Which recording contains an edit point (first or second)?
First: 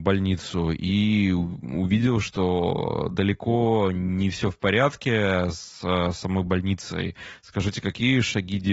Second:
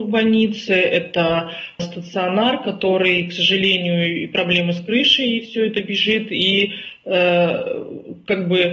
second